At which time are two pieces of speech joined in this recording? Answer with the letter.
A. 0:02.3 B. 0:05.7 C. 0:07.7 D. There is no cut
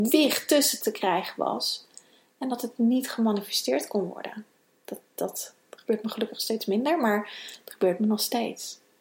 B